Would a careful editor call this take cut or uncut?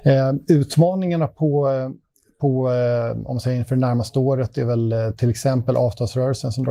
uncut